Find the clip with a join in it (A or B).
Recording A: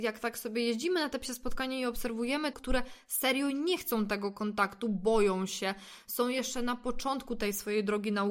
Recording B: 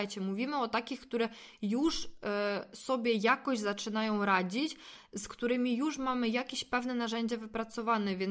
A